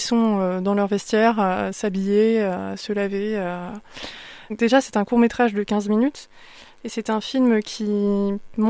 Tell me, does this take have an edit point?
yes; 1 cut; at 4.5 s

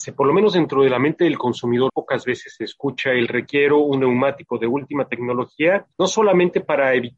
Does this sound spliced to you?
yes; 1 cut; at 1.9 s

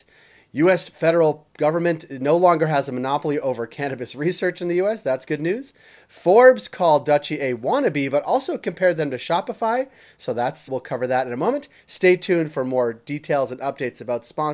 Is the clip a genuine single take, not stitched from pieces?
no; 2 cuts; at 10.7 s, 11.8 s

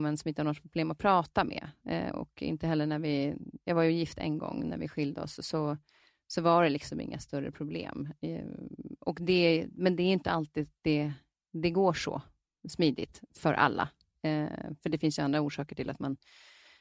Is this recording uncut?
yes; 0 cuts

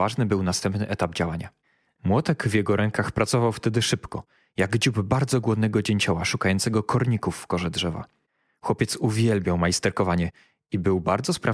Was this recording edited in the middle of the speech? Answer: yes; 1 cut; at 2.0 s

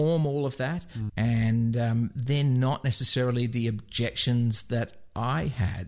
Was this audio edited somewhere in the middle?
yes; 1 cut; at 1.1 s

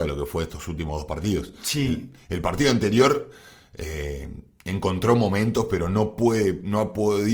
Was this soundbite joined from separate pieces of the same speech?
no; 0 cuts

